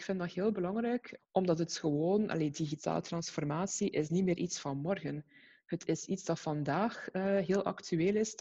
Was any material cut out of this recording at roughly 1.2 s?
yes; 1 cut; at 1.2 s

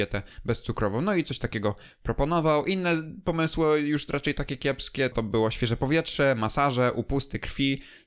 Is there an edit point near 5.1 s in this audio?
yes; 1 cut; at 5.1 s

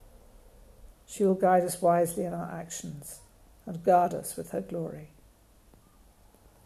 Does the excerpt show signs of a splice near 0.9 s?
yes; 1 cut; at 0.9 s

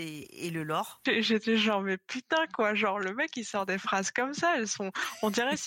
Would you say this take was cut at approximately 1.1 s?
yes; 1 cut; at 1.1 s

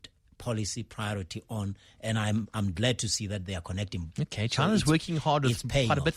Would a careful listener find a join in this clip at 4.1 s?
yes; 1 cut; at 4.1 s

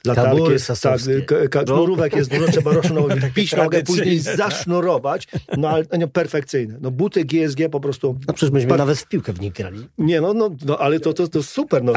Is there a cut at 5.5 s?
no; 1 cut; at 1.7 s

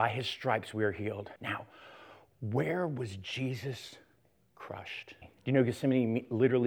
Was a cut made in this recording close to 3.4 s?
no; 2 cuts; at 1.4 s, 5.2 s

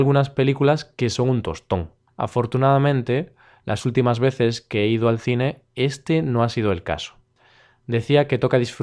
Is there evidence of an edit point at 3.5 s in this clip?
no; 1 cut; at 2.1 s

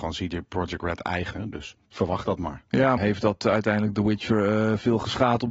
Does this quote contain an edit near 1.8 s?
yes; 2 cuts; at 1.8 s, 3.0 s

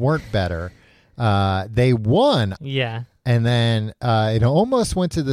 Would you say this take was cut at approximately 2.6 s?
yes; 1 cut; at 2.6 s

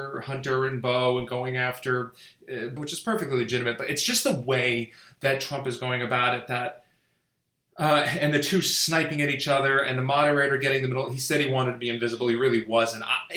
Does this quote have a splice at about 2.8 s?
yes; 1 cut; at 2.8 s

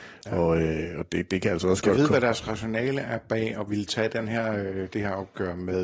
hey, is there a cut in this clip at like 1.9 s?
no; 0 cuts

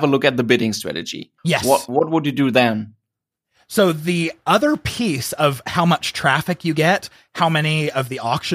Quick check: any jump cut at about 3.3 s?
no; 1 cut; at 1.4 s

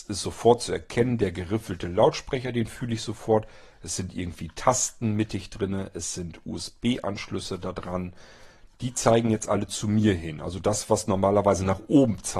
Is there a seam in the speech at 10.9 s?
no; 0 cuts

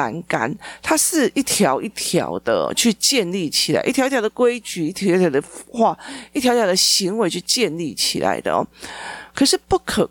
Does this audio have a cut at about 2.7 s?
no; 0 cuts

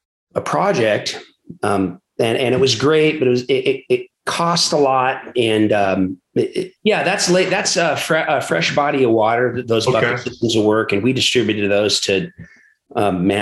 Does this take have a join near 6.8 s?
yes; 1 cut; at 6.8 s

